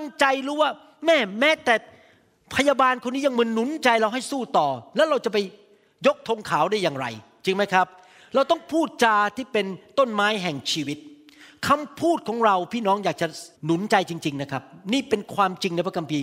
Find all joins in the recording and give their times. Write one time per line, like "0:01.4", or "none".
0:13.5